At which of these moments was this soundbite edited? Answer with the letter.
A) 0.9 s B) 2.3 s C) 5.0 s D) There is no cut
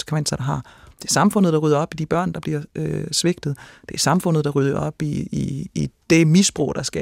A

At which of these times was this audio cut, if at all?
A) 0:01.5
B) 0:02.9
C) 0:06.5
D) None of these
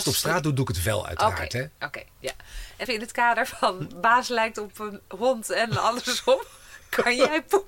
B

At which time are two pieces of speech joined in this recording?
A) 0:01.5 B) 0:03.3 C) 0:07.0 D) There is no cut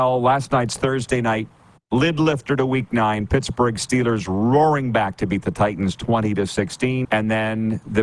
C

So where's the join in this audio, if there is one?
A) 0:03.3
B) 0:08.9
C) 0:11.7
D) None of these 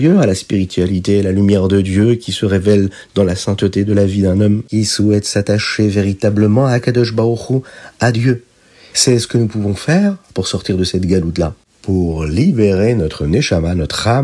B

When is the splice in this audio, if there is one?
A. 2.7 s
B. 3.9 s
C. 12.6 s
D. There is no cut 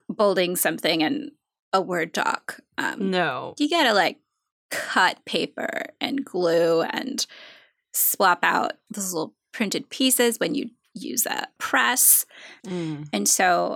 C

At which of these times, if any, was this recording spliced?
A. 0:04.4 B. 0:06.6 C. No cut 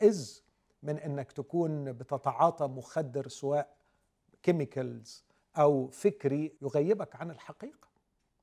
B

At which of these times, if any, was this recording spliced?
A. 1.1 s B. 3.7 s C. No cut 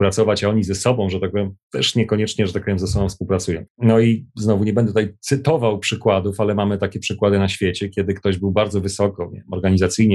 B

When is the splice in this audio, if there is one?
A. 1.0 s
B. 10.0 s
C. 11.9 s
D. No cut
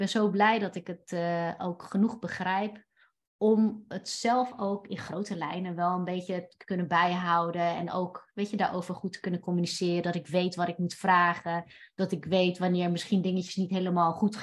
D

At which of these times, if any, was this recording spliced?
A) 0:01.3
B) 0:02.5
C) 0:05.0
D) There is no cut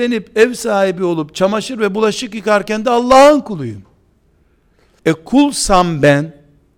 C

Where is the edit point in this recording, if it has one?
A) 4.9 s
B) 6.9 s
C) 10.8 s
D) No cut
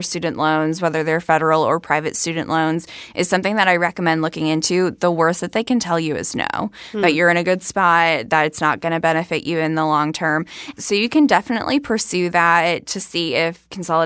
C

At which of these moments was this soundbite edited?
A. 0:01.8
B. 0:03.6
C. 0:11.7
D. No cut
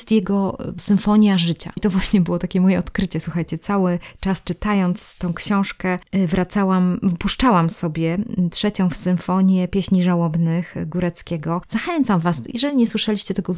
A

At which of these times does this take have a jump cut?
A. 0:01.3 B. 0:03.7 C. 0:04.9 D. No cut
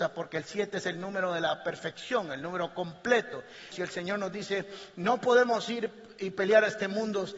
B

